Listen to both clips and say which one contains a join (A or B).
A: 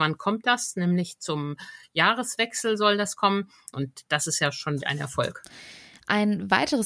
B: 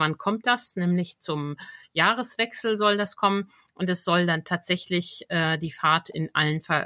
A